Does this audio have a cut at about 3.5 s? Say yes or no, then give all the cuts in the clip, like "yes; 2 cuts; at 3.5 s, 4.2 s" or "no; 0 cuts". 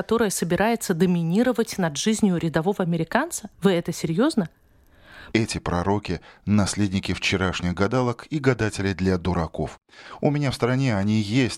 yes; 2 cuts; at 3.5 s, 5.3 s